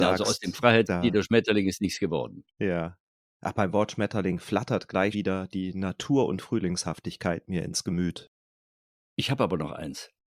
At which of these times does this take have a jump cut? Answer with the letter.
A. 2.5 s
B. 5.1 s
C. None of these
B